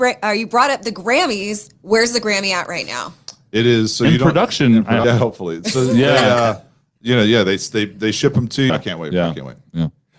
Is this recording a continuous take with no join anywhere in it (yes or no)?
no